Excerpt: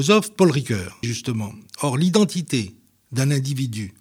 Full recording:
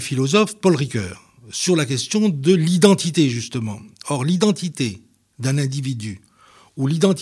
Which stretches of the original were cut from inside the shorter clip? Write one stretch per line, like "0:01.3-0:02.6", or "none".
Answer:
0:01.3-0:03.3

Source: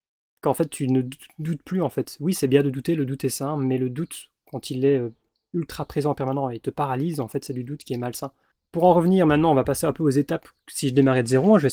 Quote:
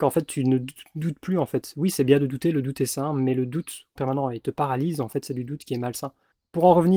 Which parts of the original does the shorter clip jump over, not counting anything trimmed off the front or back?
0:04.4-0:06.1

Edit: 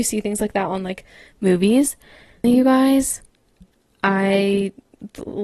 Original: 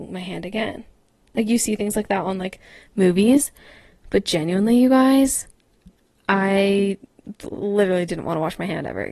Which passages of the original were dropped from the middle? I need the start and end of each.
0:04.0-0:04.7

